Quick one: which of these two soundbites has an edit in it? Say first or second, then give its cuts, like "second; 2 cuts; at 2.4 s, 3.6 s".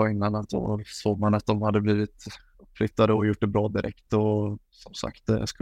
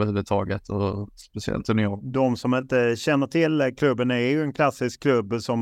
second; 1 cut; at 2.0 s